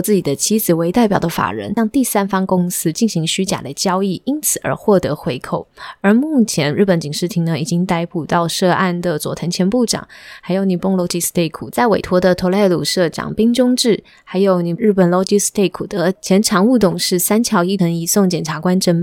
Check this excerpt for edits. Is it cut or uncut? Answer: uncut